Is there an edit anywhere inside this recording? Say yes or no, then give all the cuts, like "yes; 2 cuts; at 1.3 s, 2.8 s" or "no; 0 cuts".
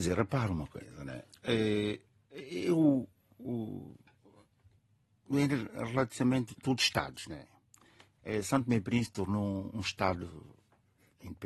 no; 0 cuts